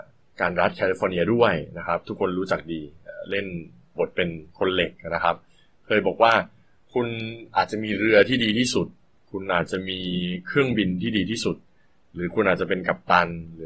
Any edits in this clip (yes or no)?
no